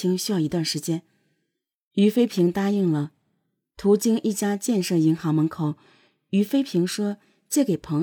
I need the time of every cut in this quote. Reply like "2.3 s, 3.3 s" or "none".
1.8 s